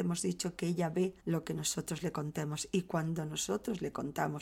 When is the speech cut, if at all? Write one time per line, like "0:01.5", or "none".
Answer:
0:01.2